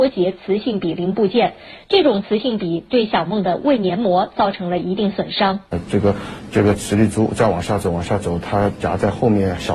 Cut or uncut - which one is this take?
uncut